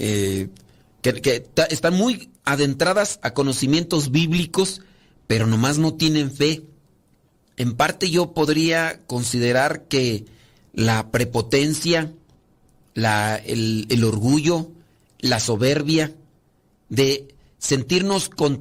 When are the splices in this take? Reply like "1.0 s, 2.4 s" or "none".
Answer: 7.5 s